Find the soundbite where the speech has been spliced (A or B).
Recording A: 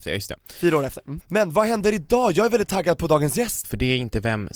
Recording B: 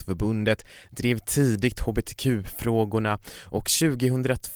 A